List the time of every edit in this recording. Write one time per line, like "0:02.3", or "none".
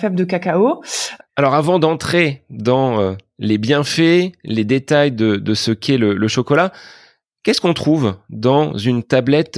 0:01.2